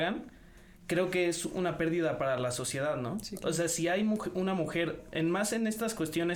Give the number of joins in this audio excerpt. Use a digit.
0